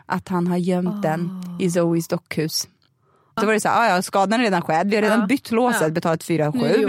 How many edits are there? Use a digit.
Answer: 1